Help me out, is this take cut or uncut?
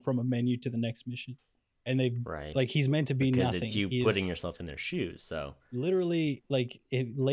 cut